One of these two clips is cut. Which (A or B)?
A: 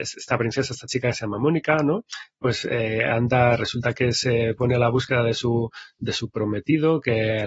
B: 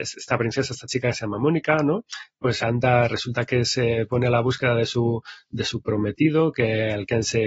B